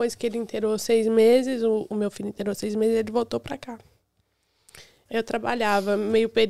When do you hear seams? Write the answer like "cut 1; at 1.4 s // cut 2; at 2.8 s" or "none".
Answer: cut 1; at 5.1 s